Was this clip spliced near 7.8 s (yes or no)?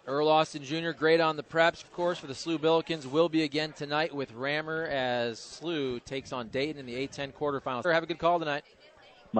yes